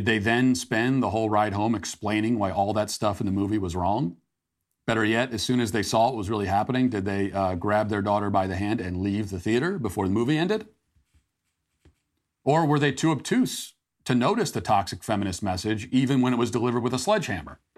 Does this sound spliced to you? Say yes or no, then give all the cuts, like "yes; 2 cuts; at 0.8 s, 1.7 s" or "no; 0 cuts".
no; 0 cuts